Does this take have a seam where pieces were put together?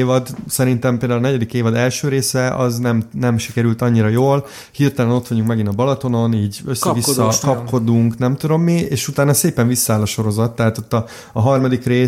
no; 0 cuts

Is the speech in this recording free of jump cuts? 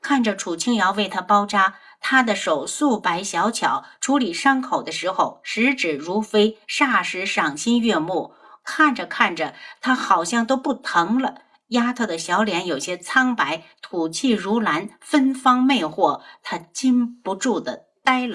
yes; 0 cuts

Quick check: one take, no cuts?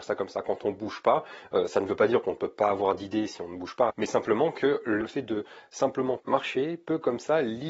no; 2 cuts; at 3.9 s, 5.0 s

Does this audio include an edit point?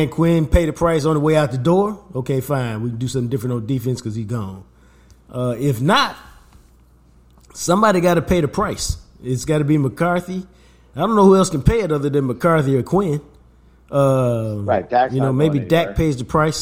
no; 0 cuts

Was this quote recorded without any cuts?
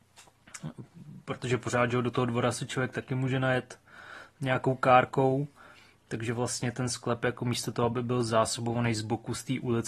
yes; 0 cuts

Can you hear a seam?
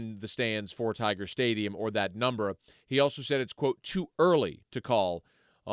no; 0 cuts

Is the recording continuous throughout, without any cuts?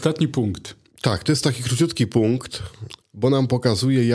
no; 2 cuts; at 0.9 s, 3.0 s

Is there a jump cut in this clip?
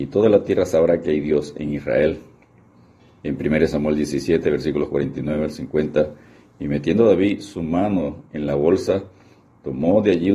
no; 0 cuts

